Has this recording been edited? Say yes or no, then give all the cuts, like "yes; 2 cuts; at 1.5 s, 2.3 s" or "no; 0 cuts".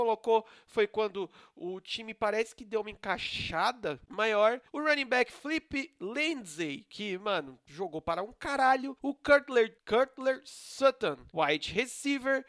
yes; 1 cut; at 4.7 s